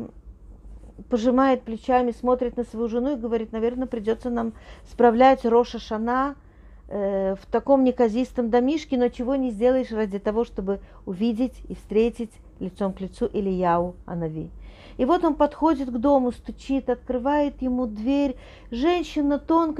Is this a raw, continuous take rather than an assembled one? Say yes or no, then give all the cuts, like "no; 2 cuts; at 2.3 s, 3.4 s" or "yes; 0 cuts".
yes; 0 cuts